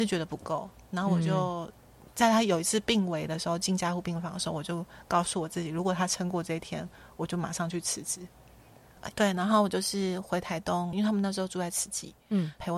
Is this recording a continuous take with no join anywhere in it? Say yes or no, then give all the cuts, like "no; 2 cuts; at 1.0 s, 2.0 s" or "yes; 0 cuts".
no; 2 cuts; at 9.1 s, 10.9 s